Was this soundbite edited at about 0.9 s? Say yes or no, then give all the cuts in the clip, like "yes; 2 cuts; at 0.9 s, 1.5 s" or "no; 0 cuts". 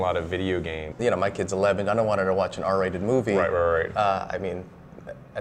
yes; 1 cut; at 0.9 s